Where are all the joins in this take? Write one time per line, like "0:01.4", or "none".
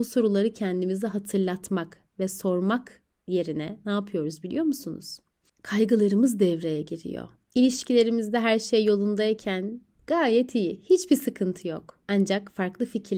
0:07.4